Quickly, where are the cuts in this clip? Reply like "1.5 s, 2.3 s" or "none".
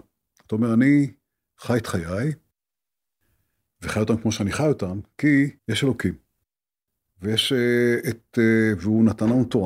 5.6 s